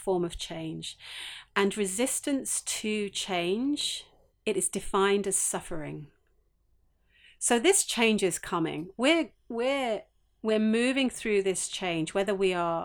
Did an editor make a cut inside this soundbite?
yes; 1 cut; at 4.3 s

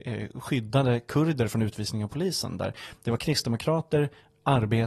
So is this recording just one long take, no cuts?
yes; 0 cuts

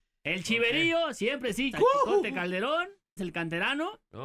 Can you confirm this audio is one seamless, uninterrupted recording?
no; 2 cuts; at 1.7 s, 3.2 s

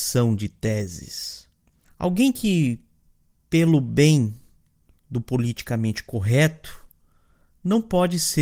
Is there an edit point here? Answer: yes; 1 cut; at 1.8 s

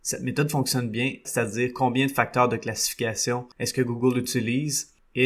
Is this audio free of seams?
no; 2 cuts; at 1.2 s, 3.5 s

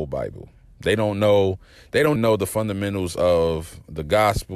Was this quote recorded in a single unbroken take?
no; 1 cut; at 2.2 s

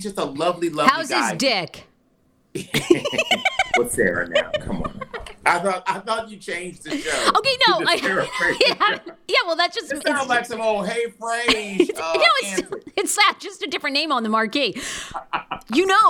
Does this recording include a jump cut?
yes; 1 cut; at 13.2 s

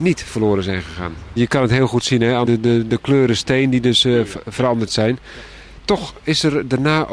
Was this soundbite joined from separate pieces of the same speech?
yes; 2 cuts; at 1.4 s, 2.4 s

